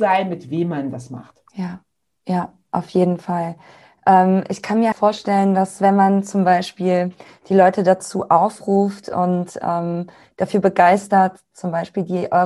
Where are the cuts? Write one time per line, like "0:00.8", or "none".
0:01.5
0:04.9